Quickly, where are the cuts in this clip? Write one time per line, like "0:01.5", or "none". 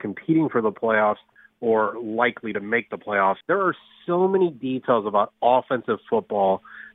0:03.4